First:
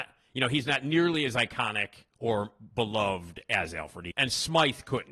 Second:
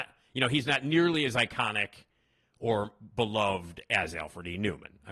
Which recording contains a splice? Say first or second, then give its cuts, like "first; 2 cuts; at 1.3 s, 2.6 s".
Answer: first; 2 cuts; at 2.1 s, 4.1 s